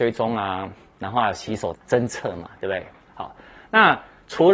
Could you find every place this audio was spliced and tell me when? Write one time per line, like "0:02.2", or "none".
0:01.8